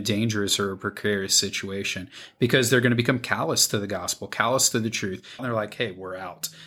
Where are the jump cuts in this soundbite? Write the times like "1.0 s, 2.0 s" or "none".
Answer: 5.4 s